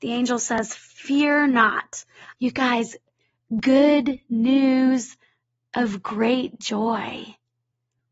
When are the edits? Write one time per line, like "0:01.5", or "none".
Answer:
0:02.3